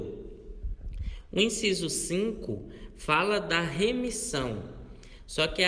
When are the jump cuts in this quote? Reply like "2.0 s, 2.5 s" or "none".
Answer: none